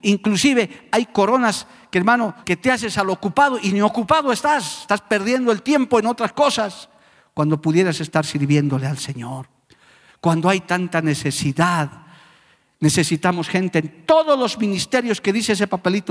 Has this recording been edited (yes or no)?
yes